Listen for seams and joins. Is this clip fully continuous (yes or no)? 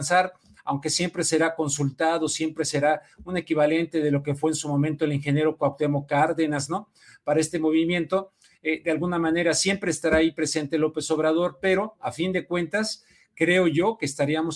yes